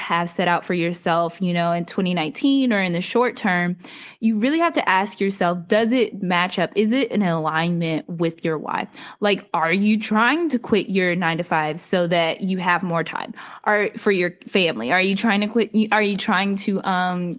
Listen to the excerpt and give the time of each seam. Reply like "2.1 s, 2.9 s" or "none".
none